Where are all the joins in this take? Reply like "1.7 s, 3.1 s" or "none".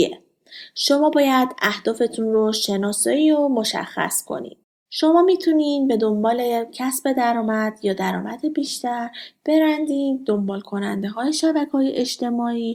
4.9 s